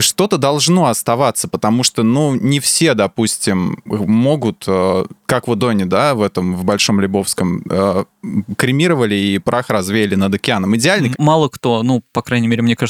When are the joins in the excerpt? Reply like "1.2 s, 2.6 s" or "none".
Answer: 5.6 s, 11.1 s